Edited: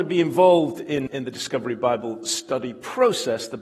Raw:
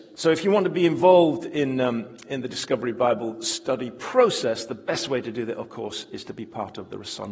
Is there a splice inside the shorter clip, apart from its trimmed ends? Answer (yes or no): yes